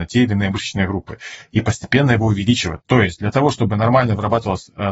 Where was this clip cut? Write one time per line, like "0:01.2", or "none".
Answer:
0:02.8